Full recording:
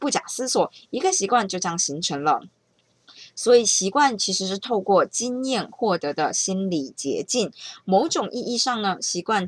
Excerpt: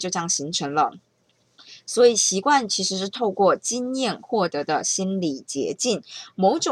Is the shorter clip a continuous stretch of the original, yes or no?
yes